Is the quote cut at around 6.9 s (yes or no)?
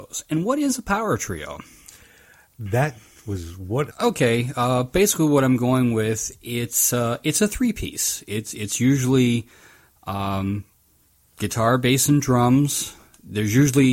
no